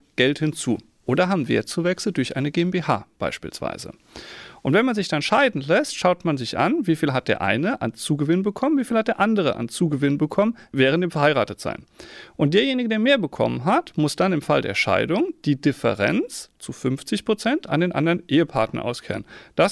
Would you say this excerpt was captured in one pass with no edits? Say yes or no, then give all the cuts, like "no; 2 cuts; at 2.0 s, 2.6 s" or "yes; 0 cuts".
yes; 0 cuts